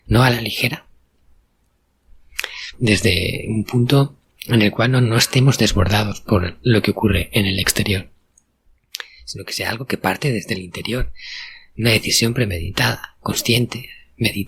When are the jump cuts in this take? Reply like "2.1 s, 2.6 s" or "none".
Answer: 2.7 s